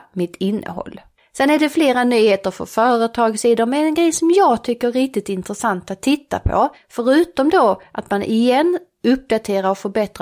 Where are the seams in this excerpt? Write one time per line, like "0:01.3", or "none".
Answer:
none